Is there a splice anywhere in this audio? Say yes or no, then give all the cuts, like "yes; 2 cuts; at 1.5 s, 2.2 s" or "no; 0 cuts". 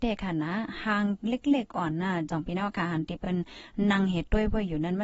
no; 0 cuts